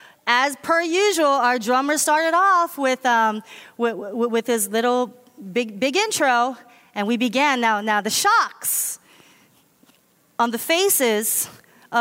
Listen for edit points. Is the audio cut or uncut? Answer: uncut